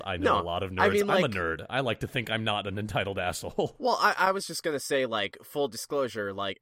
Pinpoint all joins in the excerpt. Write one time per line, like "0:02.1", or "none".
none